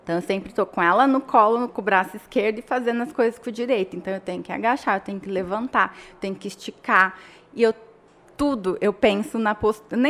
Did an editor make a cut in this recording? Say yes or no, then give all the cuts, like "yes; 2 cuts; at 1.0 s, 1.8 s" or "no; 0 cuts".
no; 0 cuts